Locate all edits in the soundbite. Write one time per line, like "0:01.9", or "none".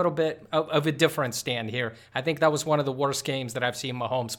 none